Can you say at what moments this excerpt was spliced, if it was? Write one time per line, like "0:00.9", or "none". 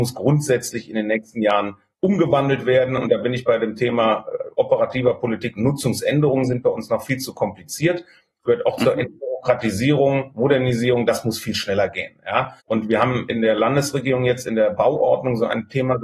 0:12.6

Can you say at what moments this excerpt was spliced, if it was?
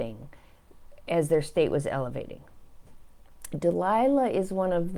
none

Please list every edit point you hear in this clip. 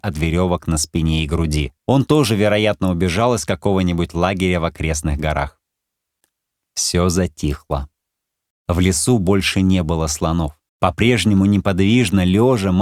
0:01.8
0:10.7

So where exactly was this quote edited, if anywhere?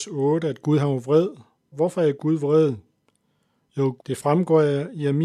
0:01.7
0:04.0

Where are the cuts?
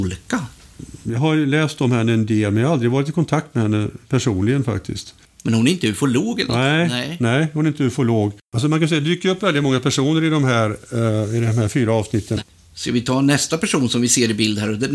0:08.4
0:12.4

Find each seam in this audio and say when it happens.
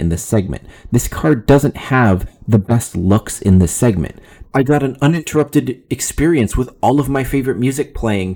0:04.4

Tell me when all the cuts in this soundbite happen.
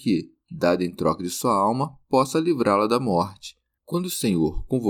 0:03.8

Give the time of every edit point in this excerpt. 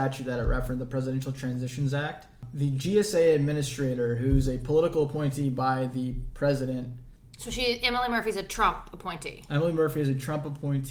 none

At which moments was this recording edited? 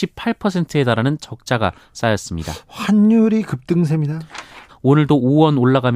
0:04.7

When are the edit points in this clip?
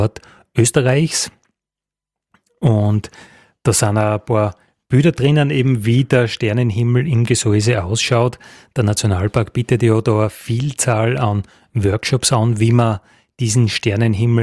none

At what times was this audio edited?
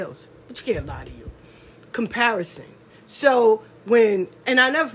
none

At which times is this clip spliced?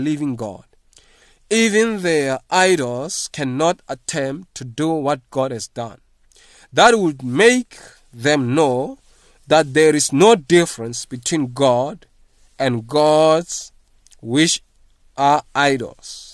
none

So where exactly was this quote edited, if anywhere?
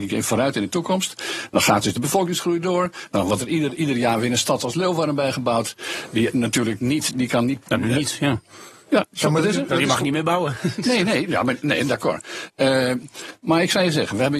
none

